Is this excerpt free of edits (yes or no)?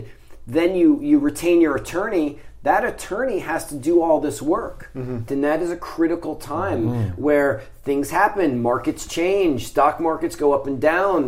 no